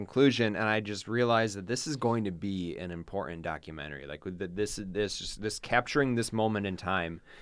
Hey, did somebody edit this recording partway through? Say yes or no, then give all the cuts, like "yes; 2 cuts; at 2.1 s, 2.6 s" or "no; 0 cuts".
no; 0 cuts